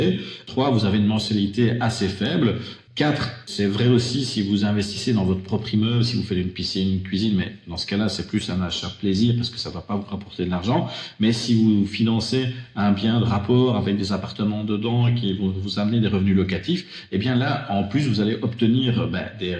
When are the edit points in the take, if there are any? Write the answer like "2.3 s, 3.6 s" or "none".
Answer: none

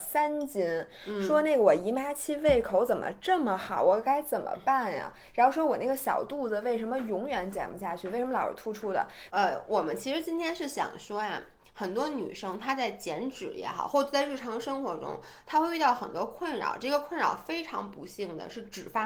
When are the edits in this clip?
9.3 s

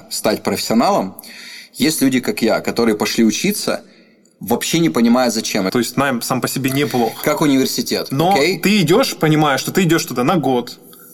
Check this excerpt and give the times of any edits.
5.7 s

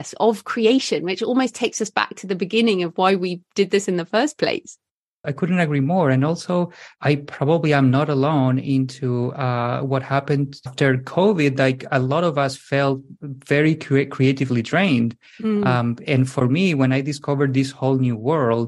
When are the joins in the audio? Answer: 5.2 s

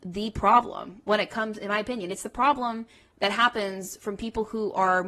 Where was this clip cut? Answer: none

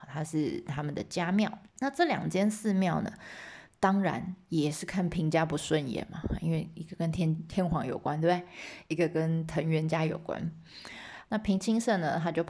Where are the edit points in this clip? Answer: 1.7 s, 11.2 s

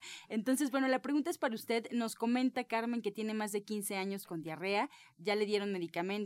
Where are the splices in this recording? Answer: none

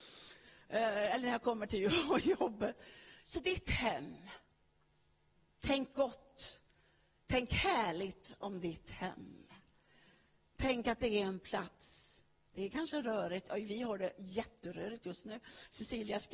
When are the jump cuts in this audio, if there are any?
3.2 s

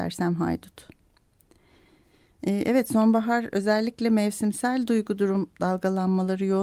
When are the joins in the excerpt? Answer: none

